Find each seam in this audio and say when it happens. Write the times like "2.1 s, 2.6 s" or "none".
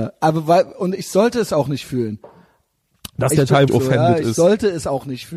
3.7 s